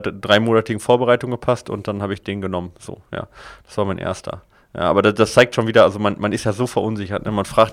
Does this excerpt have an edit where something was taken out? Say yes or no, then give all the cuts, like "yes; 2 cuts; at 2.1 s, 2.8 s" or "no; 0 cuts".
no; 0 cuts